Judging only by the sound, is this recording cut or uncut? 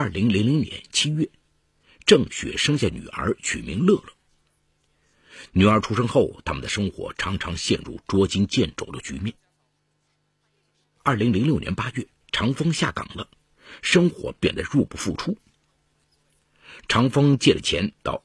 cut